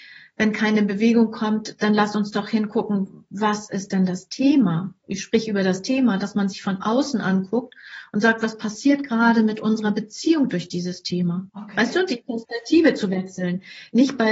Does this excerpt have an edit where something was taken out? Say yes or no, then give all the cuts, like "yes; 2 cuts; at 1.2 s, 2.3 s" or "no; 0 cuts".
yes; 1 cut; at 11.5 s